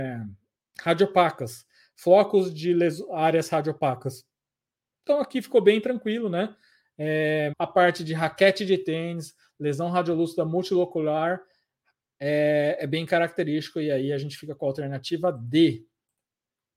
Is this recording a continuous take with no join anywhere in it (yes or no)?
no